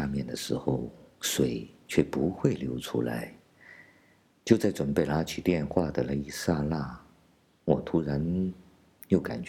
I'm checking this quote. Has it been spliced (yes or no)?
yes